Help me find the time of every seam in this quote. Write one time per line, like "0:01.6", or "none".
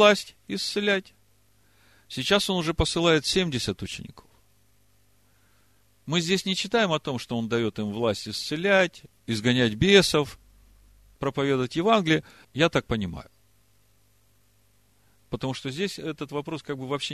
0:12.4